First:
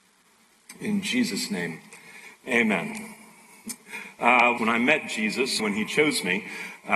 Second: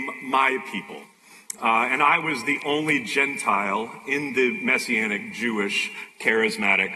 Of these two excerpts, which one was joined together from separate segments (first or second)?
first